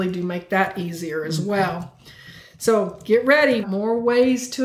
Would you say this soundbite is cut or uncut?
cut